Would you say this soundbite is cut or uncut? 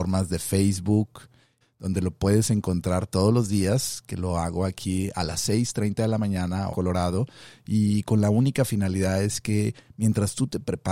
cut